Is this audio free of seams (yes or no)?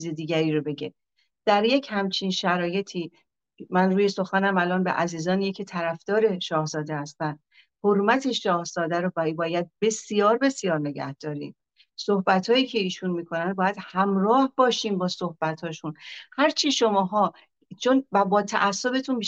yes